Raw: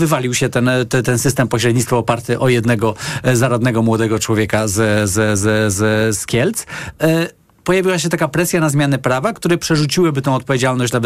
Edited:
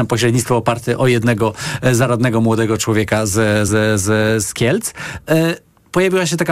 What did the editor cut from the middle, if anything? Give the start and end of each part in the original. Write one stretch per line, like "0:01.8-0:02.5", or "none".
0:05.1-0:05.4